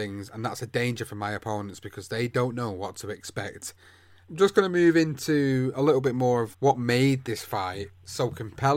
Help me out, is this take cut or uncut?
cut